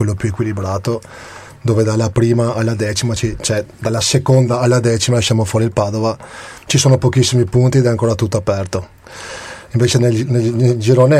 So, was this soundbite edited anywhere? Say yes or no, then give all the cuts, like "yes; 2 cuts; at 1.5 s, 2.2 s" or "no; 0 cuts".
no; 0 cuts